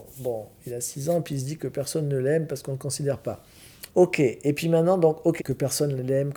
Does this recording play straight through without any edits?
no; 2 cuts; at 3.9 s, 5.4 s

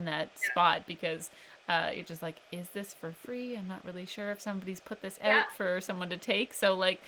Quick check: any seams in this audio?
no; 0 cuts

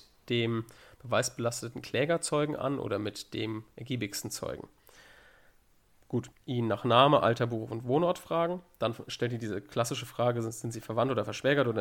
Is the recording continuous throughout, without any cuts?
no; 1 cut; at 6.3 s

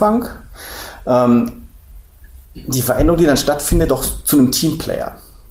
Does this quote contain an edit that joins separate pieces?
yes; 2 cuts; at 2.4 s, 3.9 s

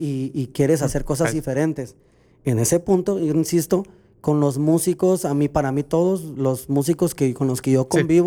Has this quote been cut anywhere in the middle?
no; 0 cuts

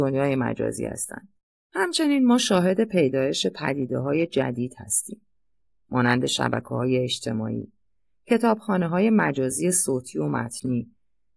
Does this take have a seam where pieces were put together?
no; 0 cuts

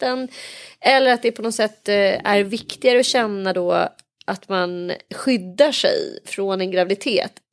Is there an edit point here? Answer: no; 0 cuts

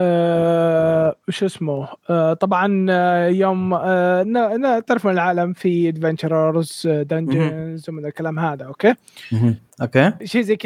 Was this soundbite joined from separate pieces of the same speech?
yes; 1 cut; at 9.7 s

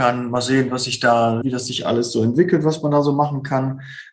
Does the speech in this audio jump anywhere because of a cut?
yes; 1 cut; at 1.4 s

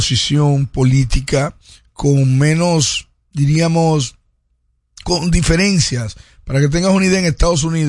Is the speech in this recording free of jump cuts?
no; 1 cut; at 5.0 s

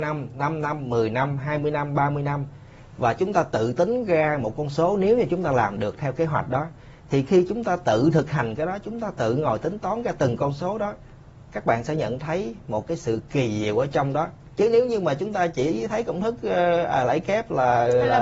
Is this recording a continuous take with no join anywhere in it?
yes; 0 cuts

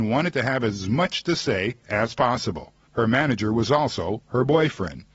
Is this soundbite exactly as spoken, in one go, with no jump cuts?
no; 1 cut; at 2.9 s

